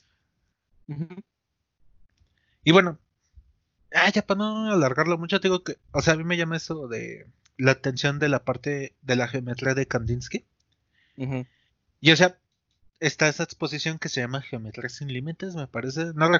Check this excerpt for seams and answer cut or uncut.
cut